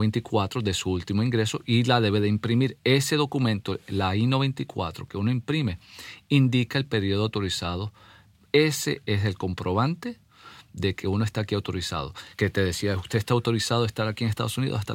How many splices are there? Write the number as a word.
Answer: two